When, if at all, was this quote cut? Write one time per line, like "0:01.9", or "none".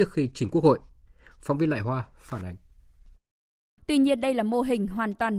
0:03.8